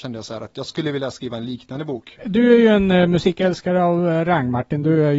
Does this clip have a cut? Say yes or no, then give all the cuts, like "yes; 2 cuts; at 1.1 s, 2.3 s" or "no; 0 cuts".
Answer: yes; 1 cut; at 2.2 s